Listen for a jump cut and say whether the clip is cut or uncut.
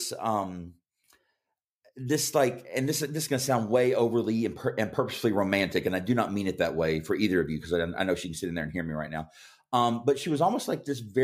uncut